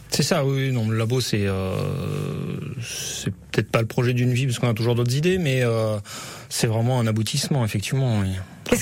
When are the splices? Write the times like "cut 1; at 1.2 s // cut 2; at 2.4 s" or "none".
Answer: none